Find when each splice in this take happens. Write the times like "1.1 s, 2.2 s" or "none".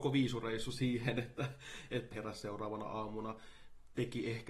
2.1 s